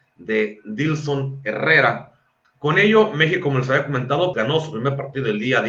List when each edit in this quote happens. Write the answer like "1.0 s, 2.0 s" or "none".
2.4 s, 4.3 s